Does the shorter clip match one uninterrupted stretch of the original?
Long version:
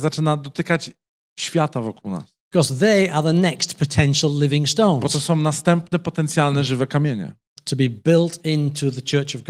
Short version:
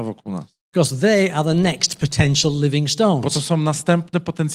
yes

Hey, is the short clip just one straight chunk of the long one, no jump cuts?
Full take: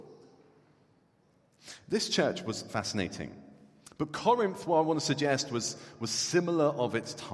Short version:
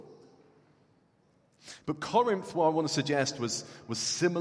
no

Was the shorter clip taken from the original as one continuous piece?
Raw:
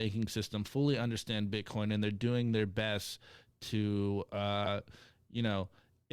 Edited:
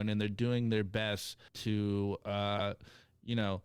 no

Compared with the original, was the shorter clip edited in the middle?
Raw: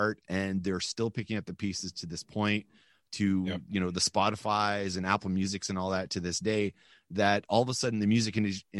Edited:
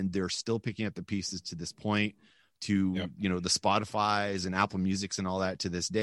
no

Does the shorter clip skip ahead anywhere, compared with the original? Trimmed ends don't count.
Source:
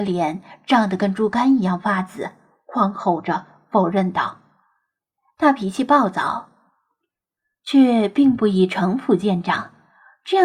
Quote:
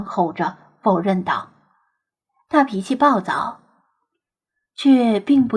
no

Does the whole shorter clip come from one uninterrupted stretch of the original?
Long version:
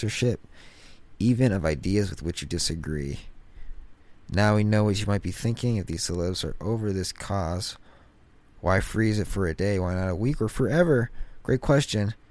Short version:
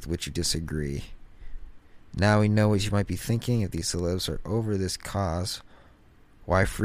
yes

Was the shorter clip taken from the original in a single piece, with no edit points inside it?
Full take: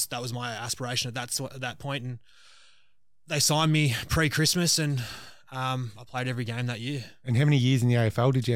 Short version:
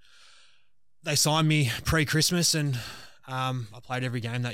yes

